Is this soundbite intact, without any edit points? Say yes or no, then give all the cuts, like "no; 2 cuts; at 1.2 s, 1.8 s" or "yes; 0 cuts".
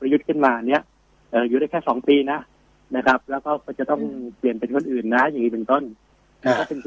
yes; 0 cuts